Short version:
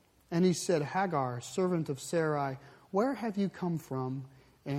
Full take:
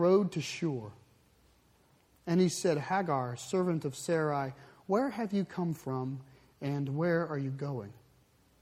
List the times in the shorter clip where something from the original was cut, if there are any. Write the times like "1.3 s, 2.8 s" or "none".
none